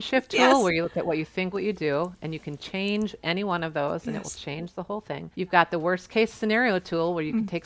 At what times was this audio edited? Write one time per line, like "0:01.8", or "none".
0:01.5
0:05.3